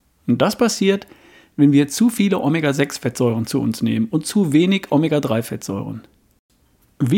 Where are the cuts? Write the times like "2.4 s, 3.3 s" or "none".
none